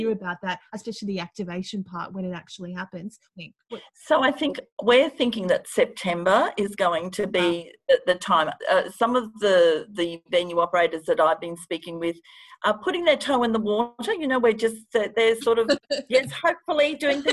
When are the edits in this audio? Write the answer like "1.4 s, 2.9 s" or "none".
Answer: 3.3 s